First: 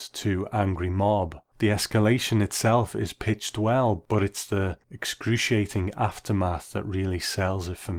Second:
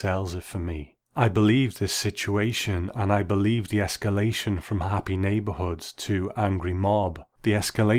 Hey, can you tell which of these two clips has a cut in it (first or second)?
second